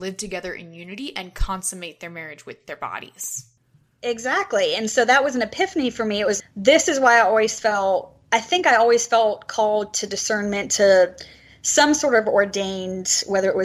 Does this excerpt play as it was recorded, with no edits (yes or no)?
no